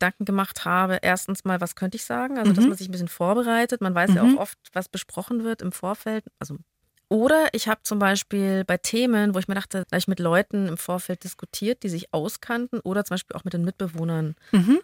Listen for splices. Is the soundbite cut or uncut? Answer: cut